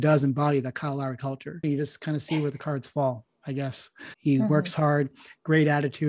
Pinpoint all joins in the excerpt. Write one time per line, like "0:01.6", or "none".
0:01.6
0:04.1